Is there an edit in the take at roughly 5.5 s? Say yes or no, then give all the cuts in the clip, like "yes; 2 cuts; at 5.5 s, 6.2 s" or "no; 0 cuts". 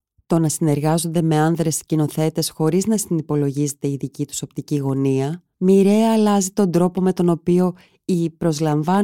yes; 1 cut; at 5.5 s